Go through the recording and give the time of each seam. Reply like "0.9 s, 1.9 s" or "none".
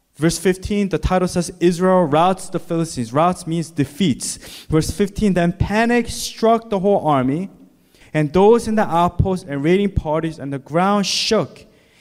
8.0 s